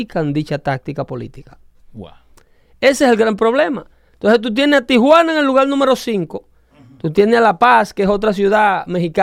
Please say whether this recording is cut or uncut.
uncut